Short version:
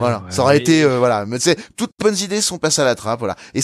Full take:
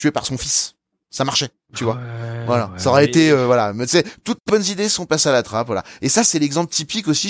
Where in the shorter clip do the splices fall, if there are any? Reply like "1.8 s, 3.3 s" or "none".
none